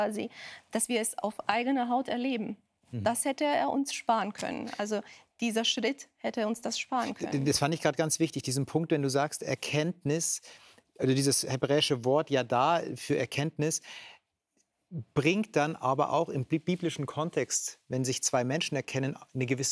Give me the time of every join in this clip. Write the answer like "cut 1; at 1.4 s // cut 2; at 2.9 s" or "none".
none